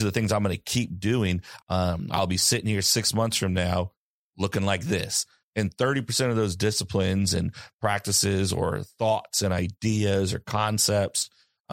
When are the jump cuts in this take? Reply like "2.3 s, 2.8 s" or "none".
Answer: 1.6 s, 5.4 s